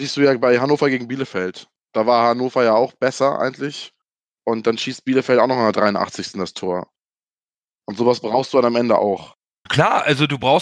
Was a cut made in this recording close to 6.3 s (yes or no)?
no